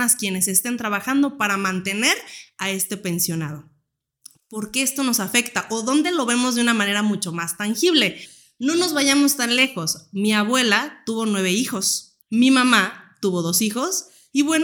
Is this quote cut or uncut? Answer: cut